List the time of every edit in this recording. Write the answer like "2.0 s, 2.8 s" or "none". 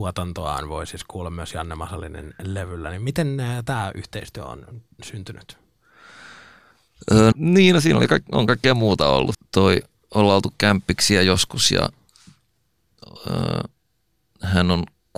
7.3 s, 9.3 s